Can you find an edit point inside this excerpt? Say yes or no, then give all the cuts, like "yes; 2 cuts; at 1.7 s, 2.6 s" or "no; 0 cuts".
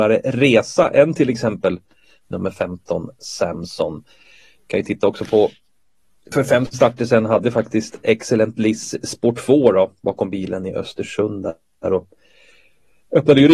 no; 0 cuts